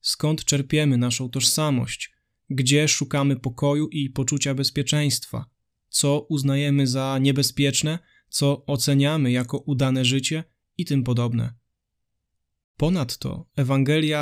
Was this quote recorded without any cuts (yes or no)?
no